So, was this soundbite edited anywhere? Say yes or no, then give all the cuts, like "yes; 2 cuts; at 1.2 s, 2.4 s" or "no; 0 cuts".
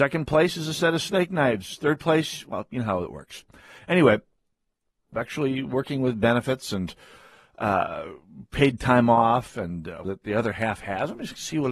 yes; 2 cuts; at 5.1 s, 10.0 s